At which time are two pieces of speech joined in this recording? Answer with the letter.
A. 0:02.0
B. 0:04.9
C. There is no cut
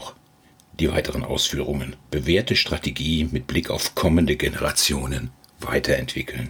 A